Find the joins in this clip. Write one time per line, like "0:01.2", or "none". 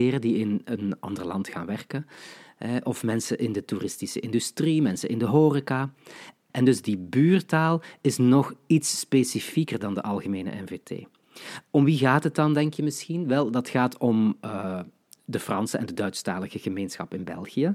0:06.5